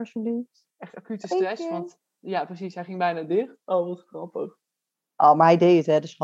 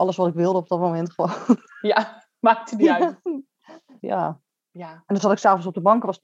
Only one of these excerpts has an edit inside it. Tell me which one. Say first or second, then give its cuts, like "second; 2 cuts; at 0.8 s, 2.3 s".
second; 1 cut; at 4.0 s